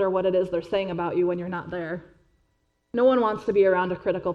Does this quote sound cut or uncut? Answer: uncut